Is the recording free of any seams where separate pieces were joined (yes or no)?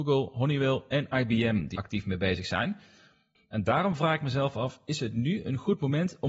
no